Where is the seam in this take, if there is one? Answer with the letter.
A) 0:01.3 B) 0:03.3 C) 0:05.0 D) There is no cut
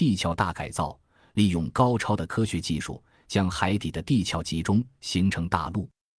D